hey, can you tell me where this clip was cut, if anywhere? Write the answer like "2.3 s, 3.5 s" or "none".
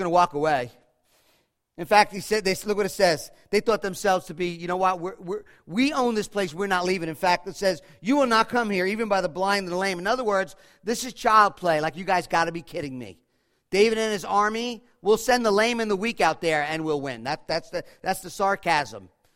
none